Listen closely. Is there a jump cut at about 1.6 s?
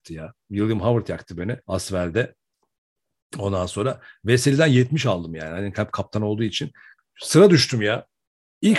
yes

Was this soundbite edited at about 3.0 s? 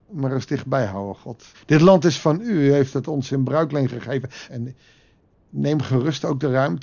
no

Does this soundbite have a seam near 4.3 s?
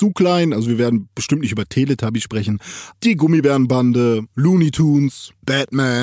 no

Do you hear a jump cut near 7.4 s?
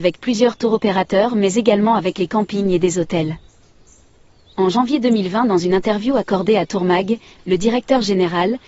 yes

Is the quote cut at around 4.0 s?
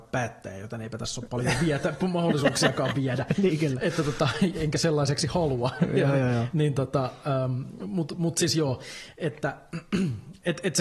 no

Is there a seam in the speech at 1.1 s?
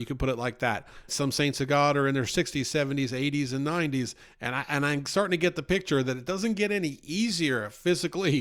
yes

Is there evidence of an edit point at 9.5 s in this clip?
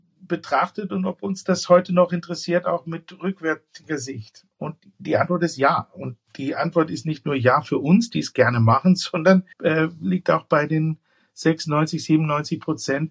yes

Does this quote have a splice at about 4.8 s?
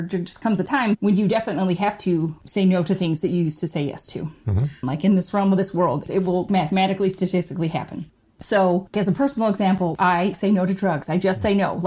yes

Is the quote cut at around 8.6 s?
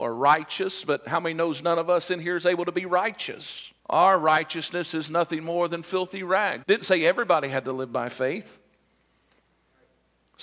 no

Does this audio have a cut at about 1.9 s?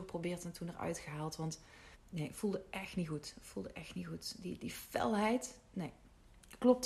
yes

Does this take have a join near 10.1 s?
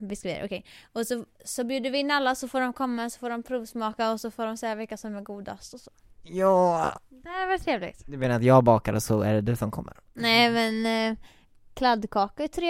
yes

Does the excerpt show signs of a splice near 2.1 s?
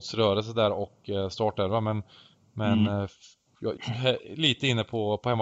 no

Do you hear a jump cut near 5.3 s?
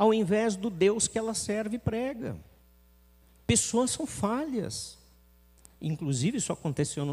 no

